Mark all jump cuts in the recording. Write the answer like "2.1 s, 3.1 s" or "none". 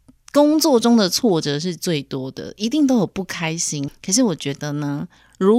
3.9 s